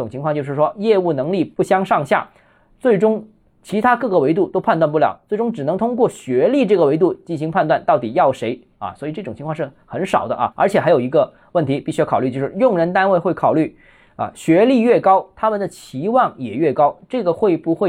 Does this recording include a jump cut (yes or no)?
no